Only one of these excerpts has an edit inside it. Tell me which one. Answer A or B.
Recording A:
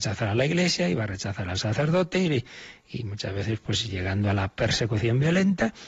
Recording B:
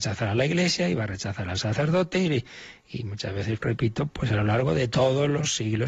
B